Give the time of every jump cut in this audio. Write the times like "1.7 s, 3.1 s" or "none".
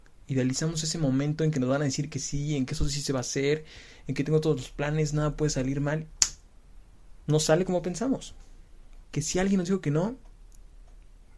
7.3 s, 9.0 s